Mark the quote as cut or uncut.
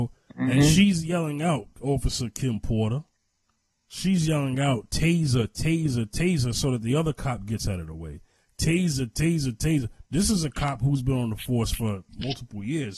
uncut